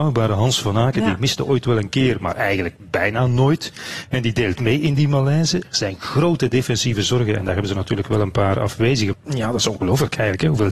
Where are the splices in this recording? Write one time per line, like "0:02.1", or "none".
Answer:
0:09.1